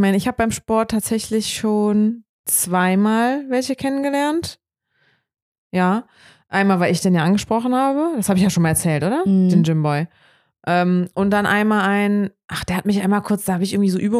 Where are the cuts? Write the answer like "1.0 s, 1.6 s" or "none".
none